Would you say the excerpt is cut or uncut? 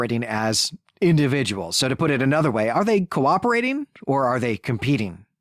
uncut